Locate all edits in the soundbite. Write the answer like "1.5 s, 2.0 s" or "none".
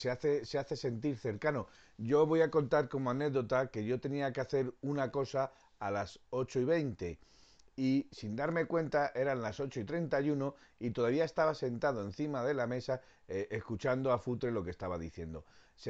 none